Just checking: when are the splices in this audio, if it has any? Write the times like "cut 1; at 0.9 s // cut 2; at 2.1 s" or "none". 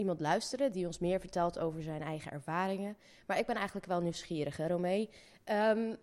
none